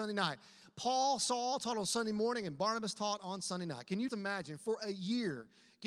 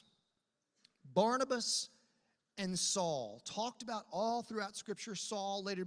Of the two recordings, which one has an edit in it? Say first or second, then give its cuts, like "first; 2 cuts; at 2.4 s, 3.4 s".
first; 1 cut; at 4.1 s